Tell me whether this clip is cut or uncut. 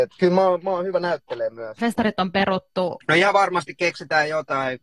cut